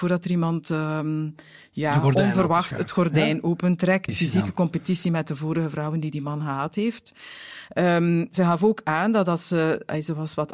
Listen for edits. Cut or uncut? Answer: cut